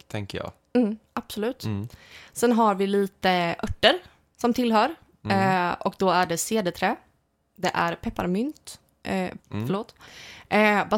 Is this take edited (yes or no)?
yes